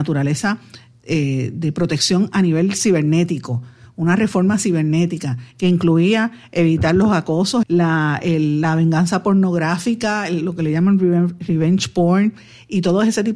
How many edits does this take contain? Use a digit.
1